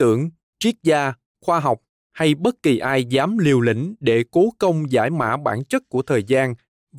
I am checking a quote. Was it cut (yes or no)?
no